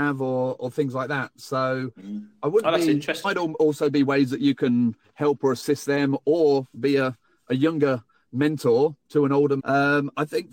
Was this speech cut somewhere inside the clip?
yes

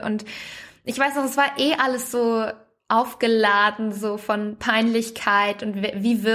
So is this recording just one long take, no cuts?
yes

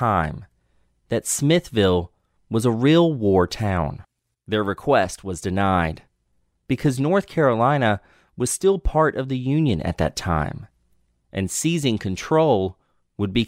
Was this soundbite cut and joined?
yes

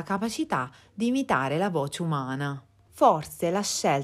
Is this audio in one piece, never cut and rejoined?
no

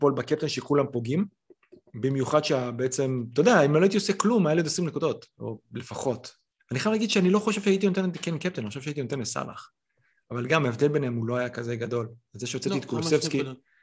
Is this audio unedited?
yes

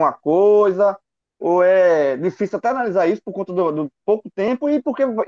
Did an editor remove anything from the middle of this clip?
no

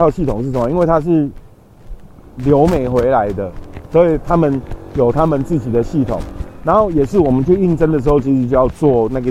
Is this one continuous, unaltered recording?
yes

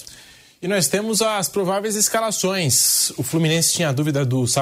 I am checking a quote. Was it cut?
no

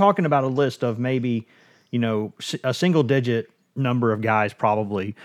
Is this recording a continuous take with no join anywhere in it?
yes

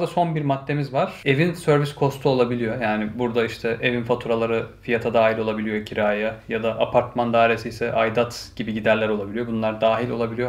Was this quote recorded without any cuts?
yes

